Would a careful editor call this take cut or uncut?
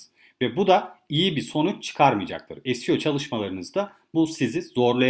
uncut